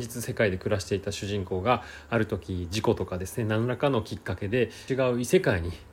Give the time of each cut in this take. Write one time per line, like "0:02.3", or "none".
0:04.9